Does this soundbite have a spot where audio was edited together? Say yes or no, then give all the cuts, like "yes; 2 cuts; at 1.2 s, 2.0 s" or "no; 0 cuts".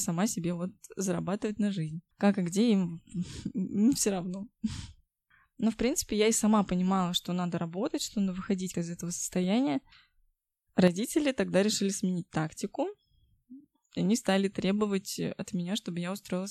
yes; 2 cuts; at 8.7 s, 10.7 s